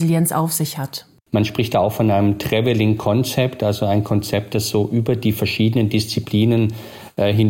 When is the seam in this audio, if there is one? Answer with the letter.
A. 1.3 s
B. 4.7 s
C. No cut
A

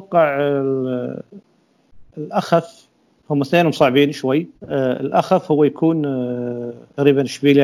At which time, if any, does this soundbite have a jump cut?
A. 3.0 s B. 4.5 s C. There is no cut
B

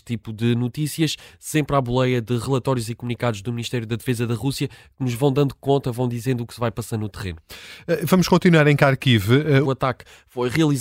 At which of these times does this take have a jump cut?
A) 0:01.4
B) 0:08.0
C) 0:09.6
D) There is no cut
C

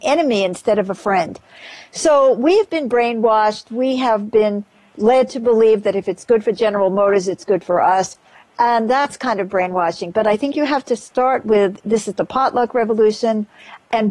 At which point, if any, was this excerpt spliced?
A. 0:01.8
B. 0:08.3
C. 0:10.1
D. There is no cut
D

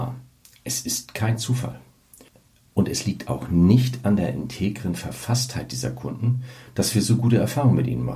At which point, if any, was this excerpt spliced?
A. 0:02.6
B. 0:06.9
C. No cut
C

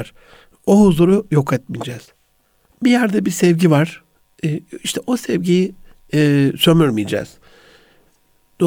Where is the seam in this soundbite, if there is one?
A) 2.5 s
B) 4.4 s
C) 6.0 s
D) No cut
D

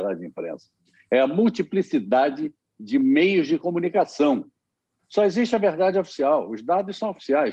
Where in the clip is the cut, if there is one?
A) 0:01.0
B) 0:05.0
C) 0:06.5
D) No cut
B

